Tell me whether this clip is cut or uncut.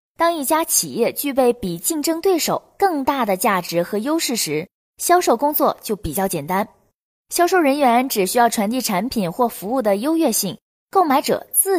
uncut